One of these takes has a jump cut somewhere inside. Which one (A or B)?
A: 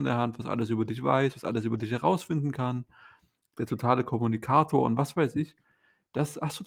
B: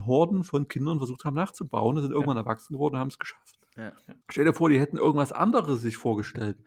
B